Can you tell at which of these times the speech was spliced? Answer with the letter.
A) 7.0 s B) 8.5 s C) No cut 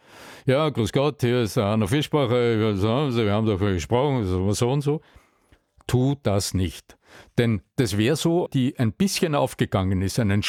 B